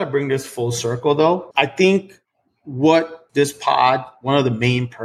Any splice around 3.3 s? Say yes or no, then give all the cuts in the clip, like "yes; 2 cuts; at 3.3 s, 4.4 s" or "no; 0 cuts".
yes; 2 cuts; at 1.5 s, 3.3 s